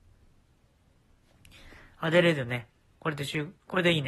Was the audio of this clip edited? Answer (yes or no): yes